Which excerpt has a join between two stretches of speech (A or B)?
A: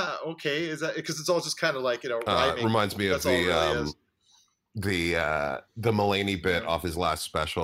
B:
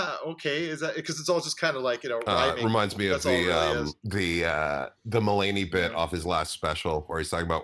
B